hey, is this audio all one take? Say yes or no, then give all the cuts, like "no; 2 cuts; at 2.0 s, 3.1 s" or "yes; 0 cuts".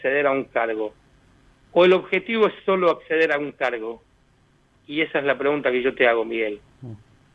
yes; 0 cuts